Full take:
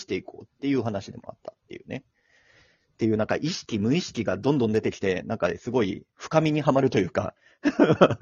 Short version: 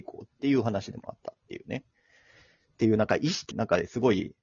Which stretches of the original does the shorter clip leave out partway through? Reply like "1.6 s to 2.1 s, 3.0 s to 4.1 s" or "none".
3.7 s to 5.2 s